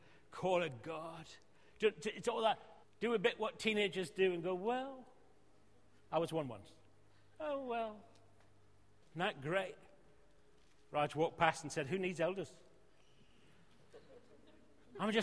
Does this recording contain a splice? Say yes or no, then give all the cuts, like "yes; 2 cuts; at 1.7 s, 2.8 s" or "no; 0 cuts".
yes; 2 cuts; at 2.8 s, 9.0 s